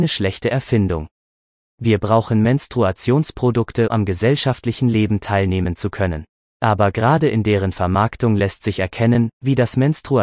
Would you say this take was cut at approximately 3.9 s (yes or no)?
yes